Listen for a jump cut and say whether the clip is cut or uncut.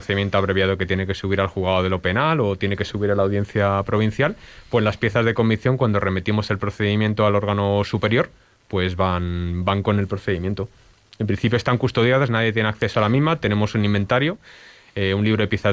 uncut